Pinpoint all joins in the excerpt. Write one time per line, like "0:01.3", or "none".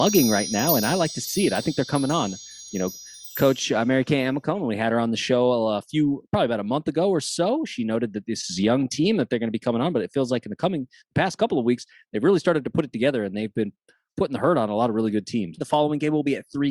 0:15.6